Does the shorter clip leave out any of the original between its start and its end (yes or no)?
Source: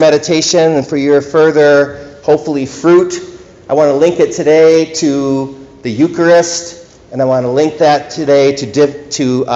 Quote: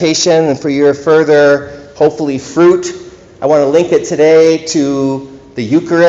no